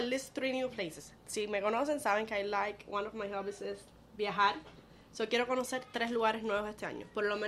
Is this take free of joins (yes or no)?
yes